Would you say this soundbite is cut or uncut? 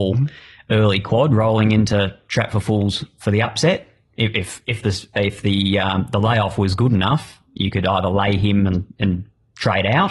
uncut